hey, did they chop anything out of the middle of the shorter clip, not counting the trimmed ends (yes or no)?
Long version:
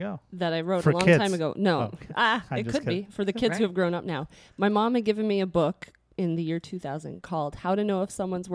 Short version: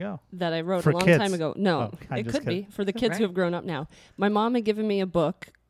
yes